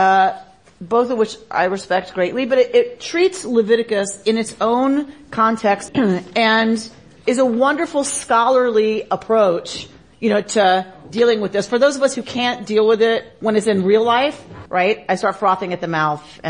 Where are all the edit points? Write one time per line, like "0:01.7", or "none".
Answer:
0:05.9
0:14.7